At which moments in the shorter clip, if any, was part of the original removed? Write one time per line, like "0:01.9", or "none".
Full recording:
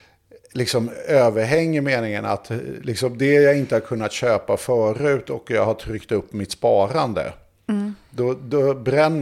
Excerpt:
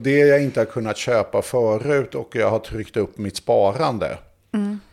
none